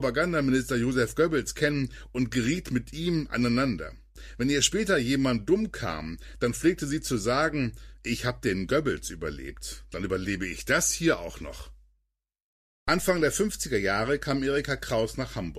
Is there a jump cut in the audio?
no; 0 cuts

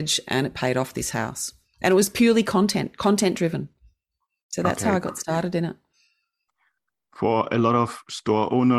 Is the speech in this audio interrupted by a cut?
no; 0 cuts

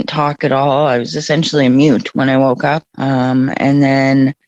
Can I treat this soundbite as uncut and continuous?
no; 1 cut; at 2.9 s

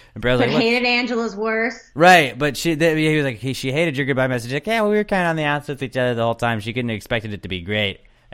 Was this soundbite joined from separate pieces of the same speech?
no; 0 cuts

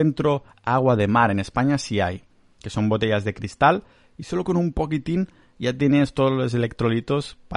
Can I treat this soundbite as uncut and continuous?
yes; 0 cuts

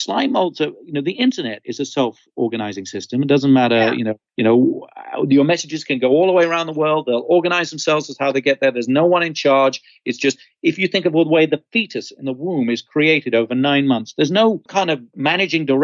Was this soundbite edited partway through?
no; 0 cuts

